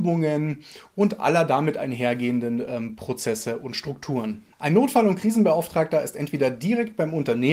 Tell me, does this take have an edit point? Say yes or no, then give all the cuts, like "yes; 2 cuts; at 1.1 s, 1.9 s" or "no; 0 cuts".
yes; 1 cut; at 4.5 s